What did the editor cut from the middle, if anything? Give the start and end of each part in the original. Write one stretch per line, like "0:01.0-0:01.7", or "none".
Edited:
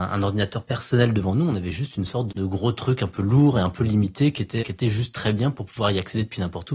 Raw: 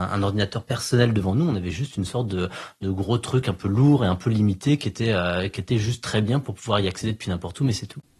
0:02.3-0:02.7
0:05.1-0:05.5